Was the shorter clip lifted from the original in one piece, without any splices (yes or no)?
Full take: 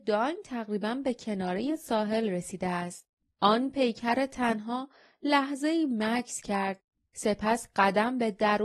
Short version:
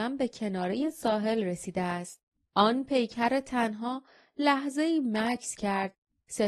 yes